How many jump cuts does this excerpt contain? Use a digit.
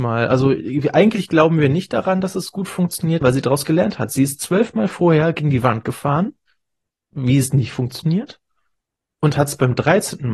2